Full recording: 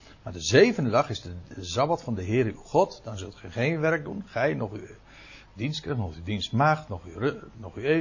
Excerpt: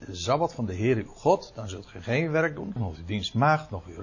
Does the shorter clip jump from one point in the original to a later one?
yes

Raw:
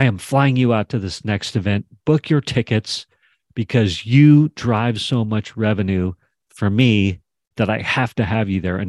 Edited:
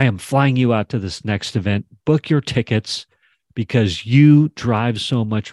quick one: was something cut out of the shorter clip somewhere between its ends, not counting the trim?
no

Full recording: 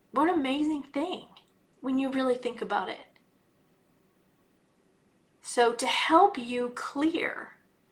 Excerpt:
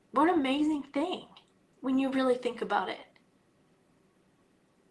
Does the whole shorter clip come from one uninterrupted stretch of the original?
yes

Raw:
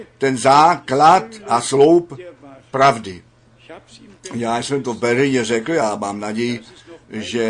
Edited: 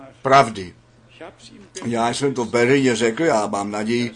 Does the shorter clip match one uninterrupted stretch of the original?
yes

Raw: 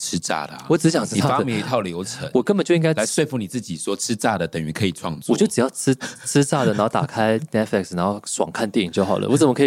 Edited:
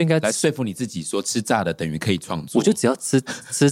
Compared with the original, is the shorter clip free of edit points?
yes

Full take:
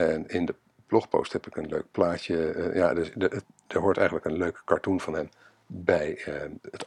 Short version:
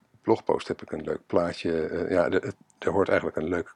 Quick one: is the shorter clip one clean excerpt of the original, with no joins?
no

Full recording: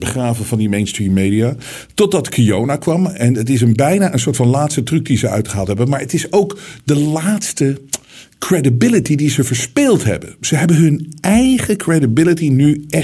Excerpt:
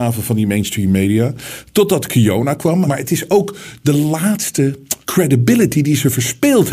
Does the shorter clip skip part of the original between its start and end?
yes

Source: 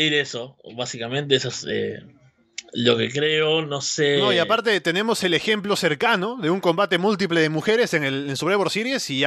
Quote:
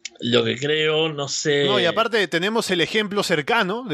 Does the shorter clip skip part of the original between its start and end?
no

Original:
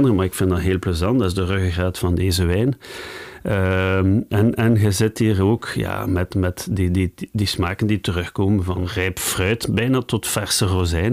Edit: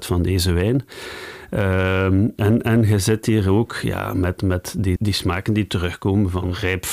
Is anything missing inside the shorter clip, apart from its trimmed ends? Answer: yes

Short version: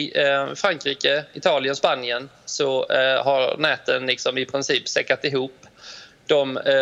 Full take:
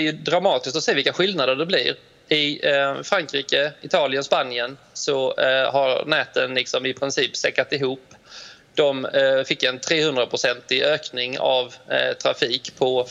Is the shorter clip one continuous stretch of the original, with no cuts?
yes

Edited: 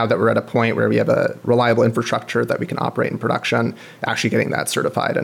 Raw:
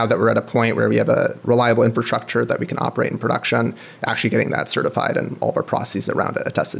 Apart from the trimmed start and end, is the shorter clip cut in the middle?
no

